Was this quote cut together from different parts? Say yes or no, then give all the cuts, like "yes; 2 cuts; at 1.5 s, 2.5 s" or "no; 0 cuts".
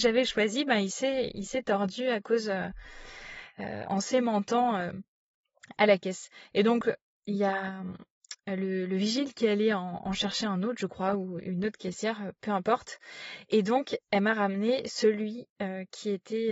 yes; 1 cut; at 3.9 s